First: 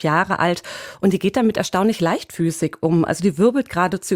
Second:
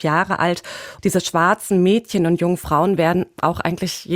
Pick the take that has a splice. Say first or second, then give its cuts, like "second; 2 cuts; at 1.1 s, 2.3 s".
second; 1 cut; at 1.0 s